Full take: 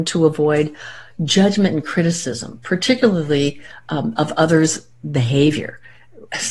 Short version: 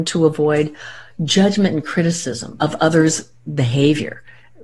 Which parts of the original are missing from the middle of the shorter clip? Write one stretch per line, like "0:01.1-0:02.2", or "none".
0:02.6-0:04.2